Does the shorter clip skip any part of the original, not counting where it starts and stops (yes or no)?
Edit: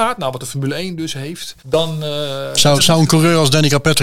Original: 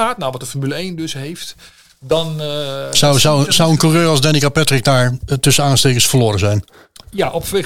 yes